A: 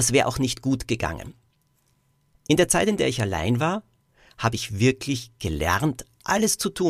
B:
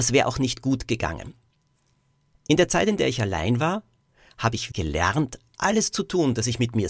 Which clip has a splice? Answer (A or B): B